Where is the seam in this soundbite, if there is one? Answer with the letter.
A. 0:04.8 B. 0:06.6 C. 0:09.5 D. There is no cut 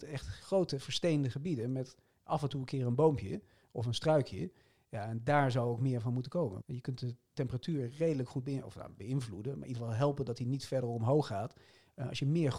B